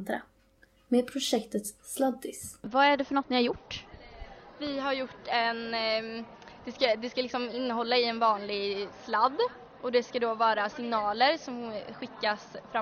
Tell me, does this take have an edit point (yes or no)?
no